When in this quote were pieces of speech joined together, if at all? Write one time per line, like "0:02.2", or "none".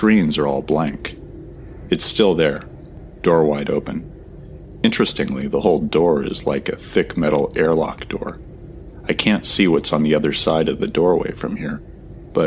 0:01.9